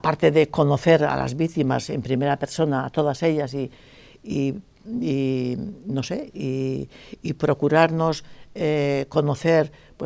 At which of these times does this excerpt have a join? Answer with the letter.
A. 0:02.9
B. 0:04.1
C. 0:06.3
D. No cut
D